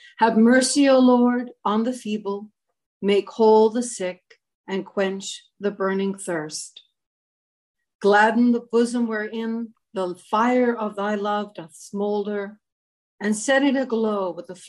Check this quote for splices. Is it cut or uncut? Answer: uncut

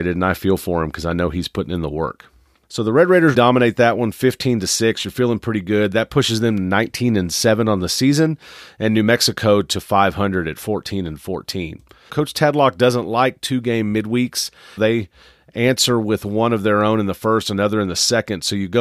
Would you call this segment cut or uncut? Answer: cut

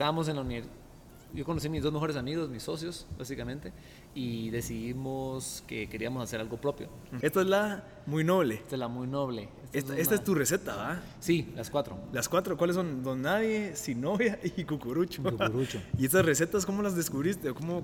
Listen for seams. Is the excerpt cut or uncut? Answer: cut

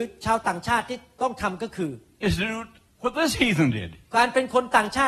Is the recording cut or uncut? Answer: cut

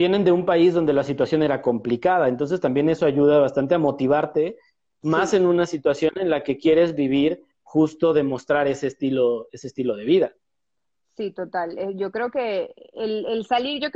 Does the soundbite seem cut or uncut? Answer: cut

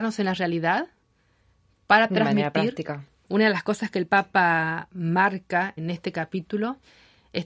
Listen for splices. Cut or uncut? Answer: cut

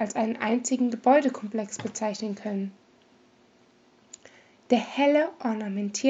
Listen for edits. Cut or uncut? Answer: uncut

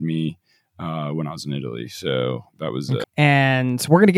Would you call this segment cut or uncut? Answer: cut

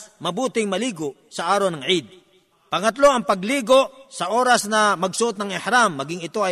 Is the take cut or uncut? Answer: cut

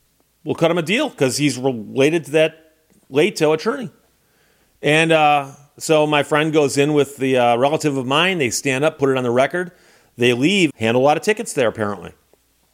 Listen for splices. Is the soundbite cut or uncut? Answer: cut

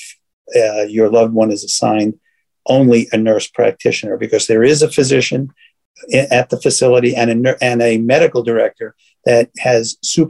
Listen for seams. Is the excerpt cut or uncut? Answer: uncut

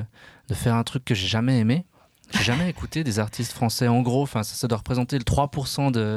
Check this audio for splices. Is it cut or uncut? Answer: uncut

